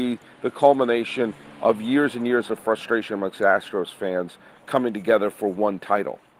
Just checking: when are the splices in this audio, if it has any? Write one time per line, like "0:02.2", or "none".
none